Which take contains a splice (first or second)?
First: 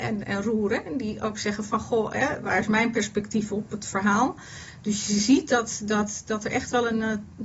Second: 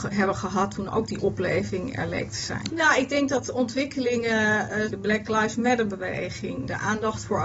second